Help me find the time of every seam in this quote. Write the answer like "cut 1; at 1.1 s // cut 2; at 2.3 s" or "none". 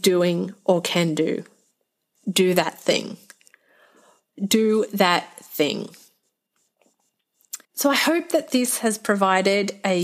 cut 1; at 4.3 s // cut 2; at 7.6 s